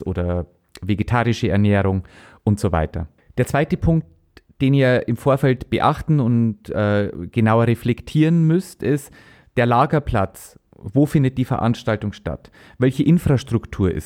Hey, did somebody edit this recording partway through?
no; 0 cuts

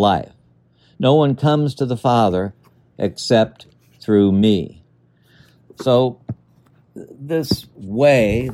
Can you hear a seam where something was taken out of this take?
no; 0 cuts

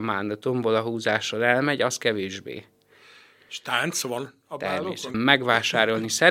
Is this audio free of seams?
no; 1 cut; at 5.1 s

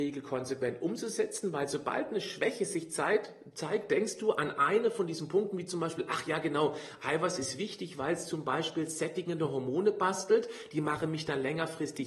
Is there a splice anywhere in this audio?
no; 0 cuts

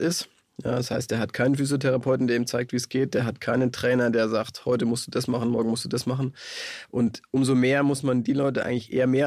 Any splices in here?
no; 0 cuts

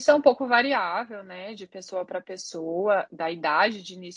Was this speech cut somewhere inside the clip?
yes; 1 cut; at 3.1 s

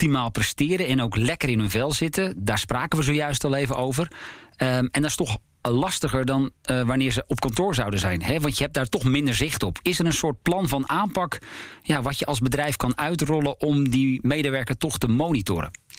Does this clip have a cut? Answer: no; 0 cuts

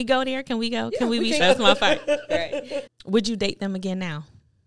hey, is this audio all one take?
no; 2 cuts; at 1.4 s, 2.9 s

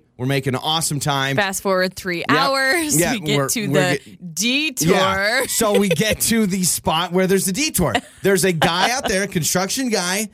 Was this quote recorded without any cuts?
yes; 0 cuts

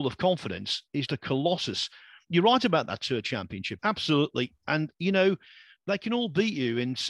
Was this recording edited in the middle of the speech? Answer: yes; 2 cuts; at 1.1 s, 3.8 s

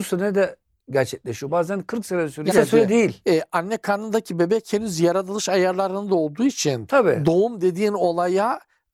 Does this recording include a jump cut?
yes; 2 cuts; at 1.5 s, 2.5 s

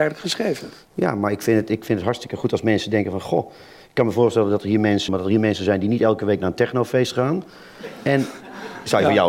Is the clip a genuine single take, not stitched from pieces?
no; 1 cut; at 5.1 s

